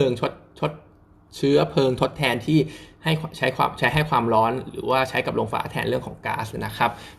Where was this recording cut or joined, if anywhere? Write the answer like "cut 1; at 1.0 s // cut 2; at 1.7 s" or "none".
cut 1; at 5.5 s